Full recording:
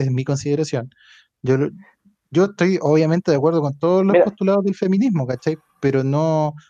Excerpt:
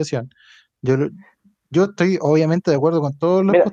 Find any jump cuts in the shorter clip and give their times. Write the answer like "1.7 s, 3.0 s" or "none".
none